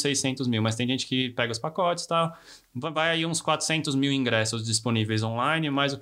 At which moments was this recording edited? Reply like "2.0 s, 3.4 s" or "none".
none